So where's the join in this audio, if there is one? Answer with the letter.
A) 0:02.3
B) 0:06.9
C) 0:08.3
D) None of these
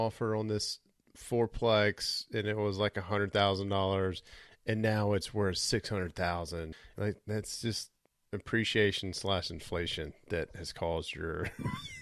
B